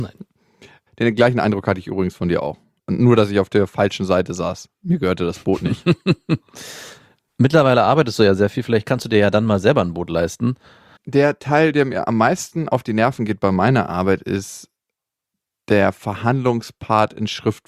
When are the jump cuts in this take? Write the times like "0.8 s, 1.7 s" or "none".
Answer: 11.0 s